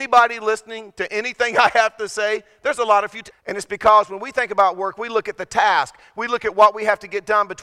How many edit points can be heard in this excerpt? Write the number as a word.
one